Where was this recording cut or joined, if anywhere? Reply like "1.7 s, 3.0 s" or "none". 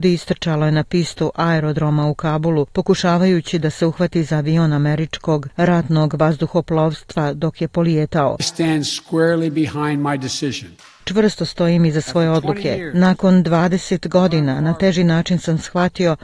8.4 s